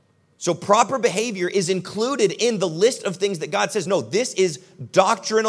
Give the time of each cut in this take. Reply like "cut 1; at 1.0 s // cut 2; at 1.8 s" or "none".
none